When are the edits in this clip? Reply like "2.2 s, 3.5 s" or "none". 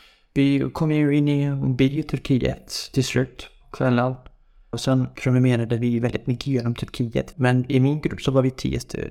4.7 s, 7.3 s